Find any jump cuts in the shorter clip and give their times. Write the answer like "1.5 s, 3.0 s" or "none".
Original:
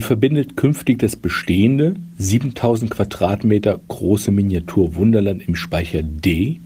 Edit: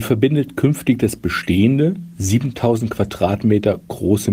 none